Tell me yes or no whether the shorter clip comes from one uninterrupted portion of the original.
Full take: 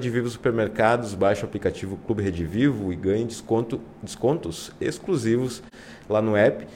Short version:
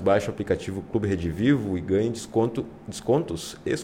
yes